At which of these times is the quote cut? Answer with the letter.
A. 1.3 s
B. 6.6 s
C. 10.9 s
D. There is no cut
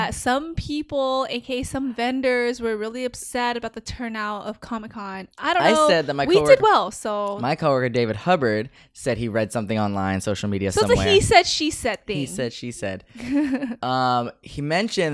B